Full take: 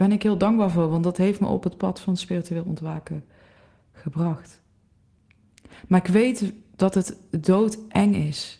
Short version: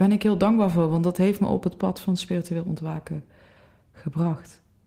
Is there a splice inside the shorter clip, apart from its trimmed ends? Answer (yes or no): no